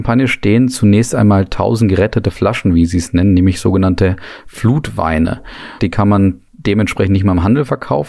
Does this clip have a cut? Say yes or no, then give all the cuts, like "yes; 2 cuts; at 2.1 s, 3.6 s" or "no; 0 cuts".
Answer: yes; 1 cut; at 5.8 s